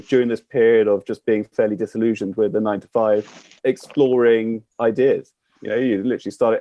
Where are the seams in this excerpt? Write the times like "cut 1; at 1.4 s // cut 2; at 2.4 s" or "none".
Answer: cut 1; at 3.6 s // cut 2; at 4.7 s